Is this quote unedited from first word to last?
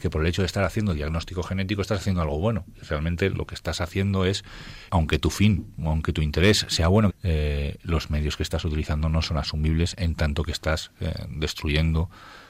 no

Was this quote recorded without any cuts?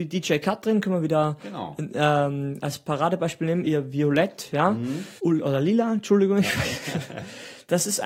no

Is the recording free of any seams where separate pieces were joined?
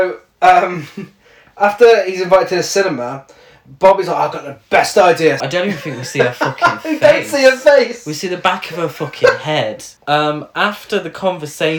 no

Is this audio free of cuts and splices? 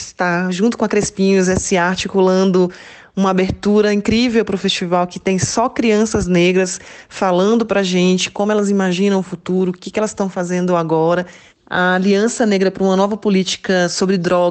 no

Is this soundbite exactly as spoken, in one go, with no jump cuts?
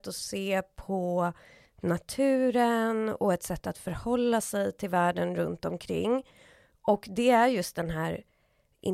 yes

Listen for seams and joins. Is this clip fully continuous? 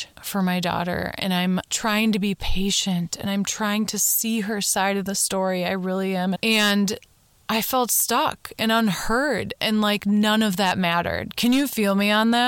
no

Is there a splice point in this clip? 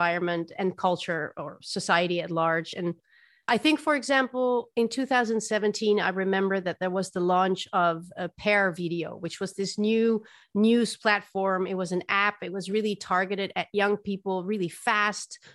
no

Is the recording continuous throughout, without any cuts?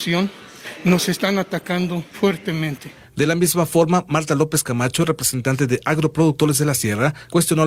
no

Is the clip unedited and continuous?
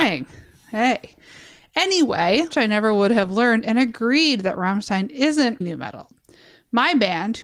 no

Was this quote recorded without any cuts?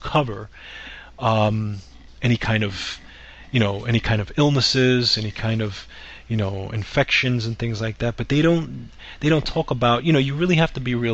yes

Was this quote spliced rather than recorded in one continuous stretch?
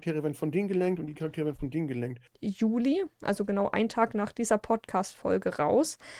yes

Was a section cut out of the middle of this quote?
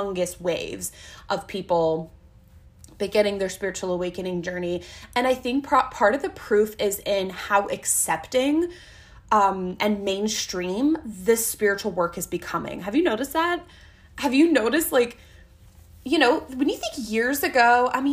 no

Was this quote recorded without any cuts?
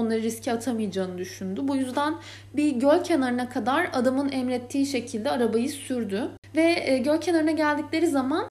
yes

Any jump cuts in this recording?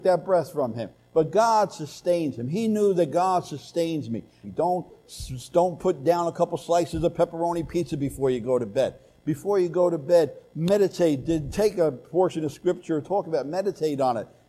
yes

